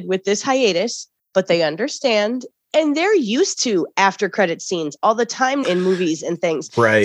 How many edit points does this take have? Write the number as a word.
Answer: two